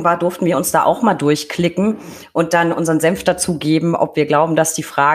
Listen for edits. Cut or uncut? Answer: uncut